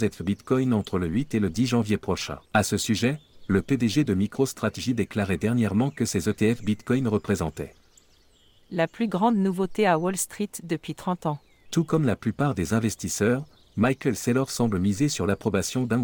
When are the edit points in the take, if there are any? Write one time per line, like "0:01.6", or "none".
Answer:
0:02.4
0:11.7